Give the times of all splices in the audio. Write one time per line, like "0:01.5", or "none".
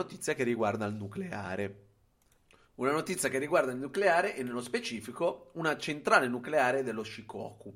none